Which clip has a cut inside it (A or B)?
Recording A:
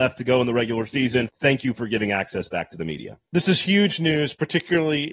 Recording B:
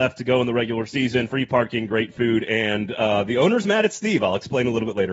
A